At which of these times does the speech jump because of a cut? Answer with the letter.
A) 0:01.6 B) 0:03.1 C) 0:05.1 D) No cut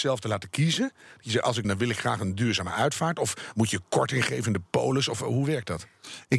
A